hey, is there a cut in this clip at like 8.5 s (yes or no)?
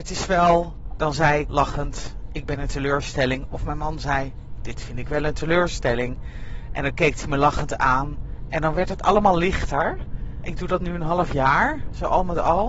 no